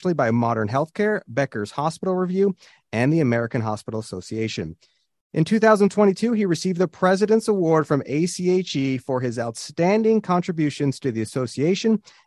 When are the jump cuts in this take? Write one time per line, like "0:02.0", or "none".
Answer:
none